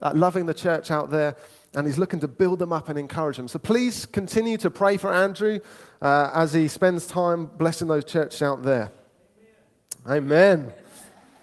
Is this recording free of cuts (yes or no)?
yes